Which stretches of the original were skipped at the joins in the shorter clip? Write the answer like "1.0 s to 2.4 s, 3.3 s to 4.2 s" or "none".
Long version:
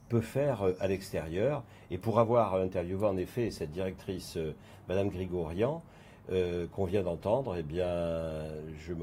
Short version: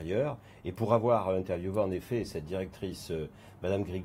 none